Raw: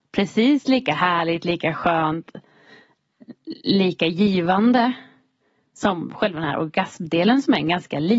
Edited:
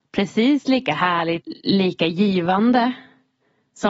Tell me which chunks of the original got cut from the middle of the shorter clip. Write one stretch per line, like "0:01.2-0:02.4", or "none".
0:01.4-0:03.4